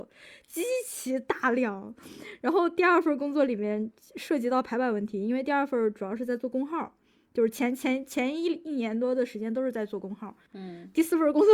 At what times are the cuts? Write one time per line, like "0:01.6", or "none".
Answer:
0:10.5